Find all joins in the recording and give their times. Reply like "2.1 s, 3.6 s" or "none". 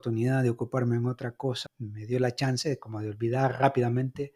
1.7 s